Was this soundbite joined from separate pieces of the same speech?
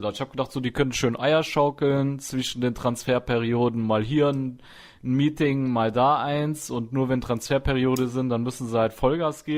no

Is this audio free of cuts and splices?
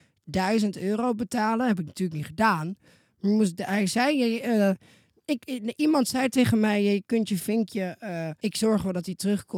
no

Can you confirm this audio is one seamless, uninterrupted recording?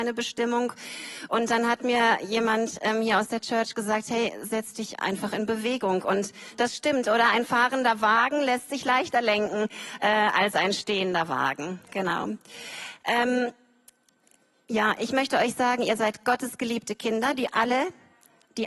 yes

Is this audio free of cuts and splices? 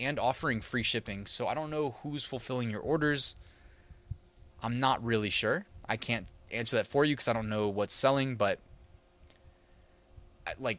no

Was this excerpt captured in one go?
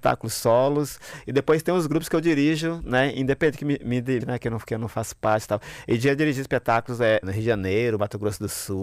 no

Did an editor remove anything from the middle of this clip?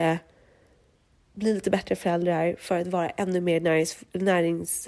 no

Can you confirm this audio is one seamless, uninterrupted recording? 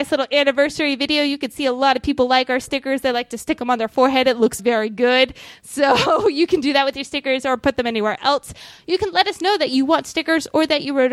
no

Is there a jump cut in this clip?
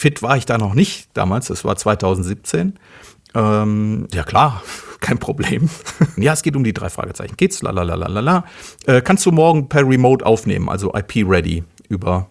yes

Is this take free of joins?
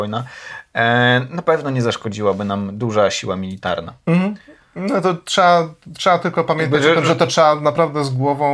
yes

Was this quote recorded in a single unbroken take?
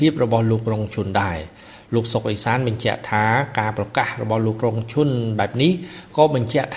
yes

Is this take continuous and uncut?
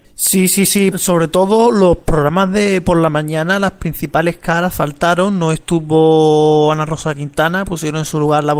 no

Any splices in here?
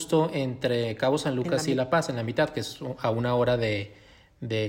no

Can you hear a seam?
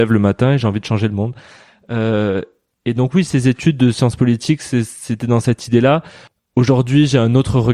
no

